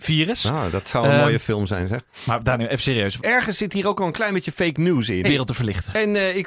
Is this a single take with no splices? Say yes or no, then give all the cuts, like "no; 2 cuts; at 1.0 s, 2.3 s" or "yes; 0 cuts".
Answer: no; 2 cuts; at 3.2 s, 5.2 s